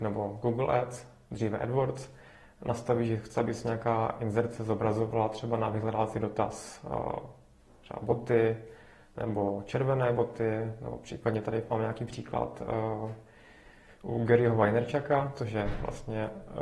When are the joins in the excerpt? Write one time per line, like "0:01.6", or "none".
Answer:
none